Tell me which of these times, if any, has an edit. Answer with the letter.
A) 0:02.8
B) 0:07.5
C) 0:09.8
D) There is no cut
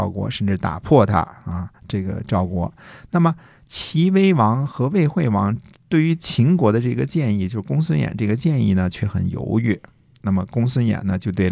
D